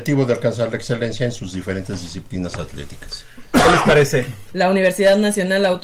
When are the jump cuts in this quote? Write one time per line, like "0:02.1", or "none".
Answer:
0:04.5